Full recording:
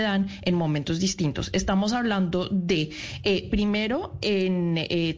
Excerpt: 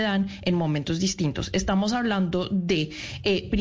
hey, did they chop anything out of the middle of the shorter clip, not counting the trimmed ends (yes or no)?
no